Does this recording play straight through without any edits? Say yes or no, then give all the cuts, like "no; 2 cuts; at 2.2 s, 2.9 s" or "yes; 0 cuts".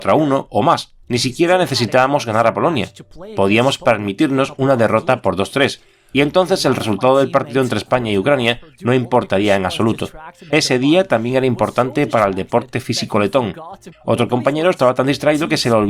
no; 3 cuts; at 1.0 s, 10.5 s, 13.9 s